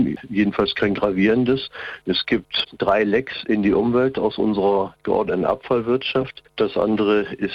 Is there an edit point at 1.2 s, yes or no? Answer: no